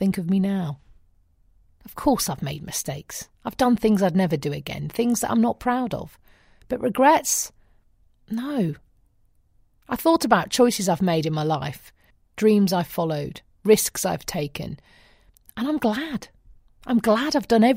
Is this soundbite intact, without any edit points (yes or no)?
yes